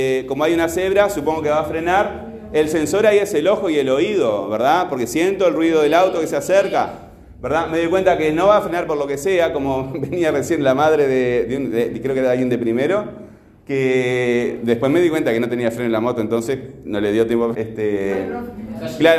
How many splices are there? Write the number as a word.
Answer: one